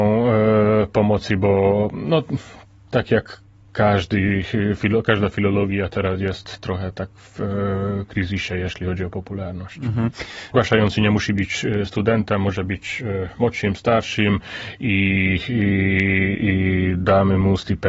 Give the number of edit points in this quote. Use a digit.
1